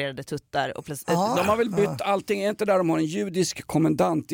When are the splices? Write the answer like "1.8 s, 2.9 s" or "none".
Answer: 1.3 s

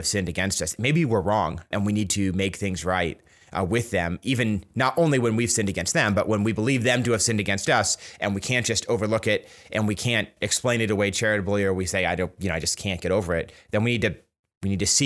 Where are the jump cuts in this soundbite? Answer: 1.7 s

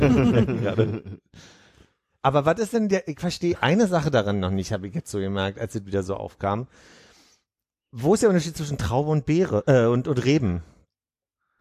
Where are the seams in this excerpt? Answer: none

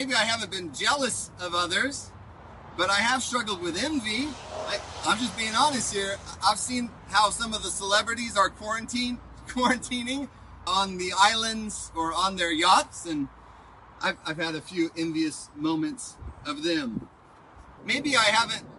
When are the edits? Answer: 10.7 s, 17.8 s

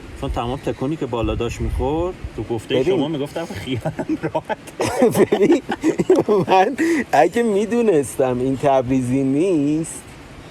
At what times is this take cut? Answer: none

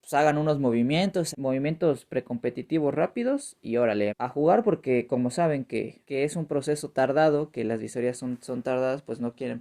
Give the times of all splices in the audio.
1.3 s, 4.1 s, 6.0 s

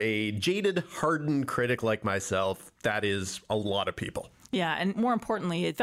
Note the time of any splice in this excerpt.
none

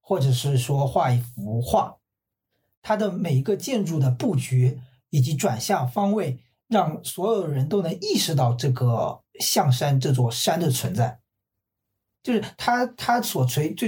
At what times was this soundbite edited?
none

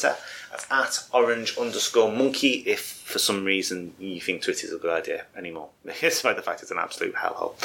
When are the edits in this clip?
none

